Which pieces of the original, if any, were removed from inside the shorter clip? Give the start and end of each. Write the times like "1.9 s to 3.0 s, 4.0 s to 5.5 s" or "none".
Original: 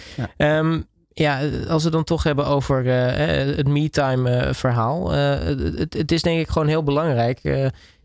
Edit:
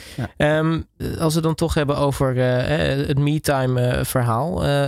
1.0 s to 1.5 s